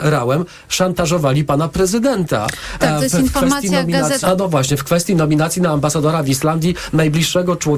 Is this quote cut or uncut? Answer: cut